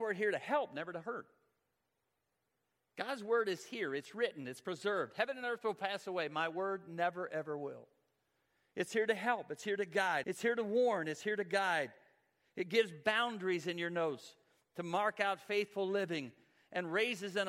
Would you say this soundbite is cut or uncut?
cut